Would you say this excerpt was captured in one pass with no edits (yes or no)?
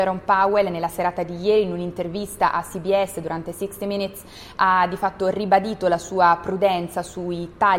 yes